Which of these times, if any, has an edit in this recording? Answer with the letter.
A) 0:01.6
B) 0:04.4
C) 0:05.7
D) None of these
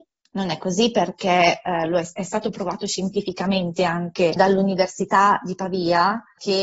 B